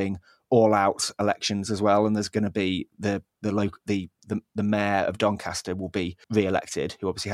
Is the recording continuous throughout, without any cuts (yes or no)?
no